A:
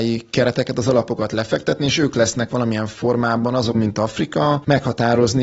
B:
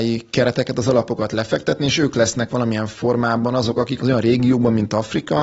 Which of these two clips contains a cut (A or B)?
A